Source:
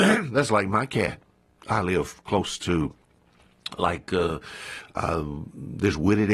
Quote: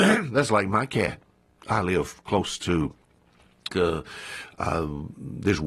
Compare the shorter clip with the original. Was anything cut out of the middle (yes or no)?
yes